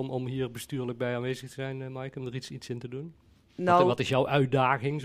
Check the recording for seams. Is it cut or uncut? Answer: uncut